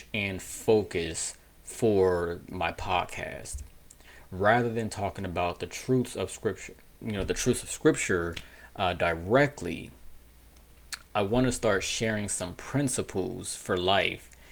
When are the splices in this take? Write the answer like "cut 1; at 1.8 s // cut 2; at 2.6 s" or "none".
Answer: none